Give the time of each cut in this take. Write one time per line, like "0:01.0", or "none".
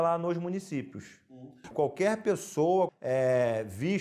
0:01.7
0:02.9